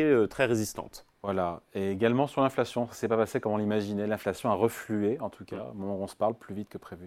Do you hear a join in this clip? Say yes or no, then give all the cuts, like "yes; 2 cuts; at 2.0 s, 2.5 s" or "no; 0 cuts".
no; 0 cuts